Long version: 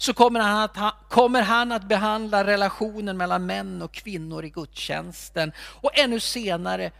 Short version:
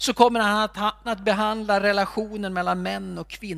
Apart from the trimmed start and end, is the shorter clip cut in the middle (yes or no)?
yes